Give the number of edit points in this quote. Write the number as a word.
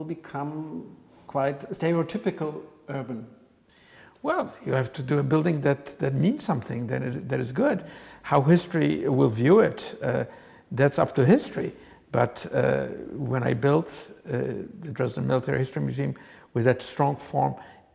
zero